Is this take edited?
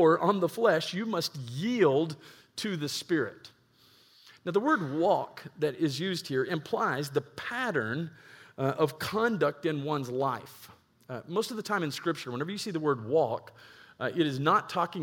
no; 0 cuts

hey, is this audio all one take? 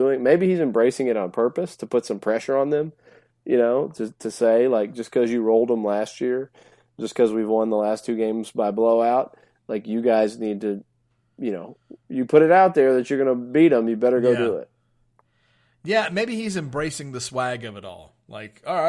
yes; 0 cuts

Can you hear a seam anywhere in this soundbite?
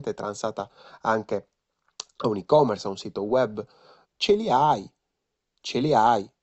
yes; 1 cut; at 4.0 s

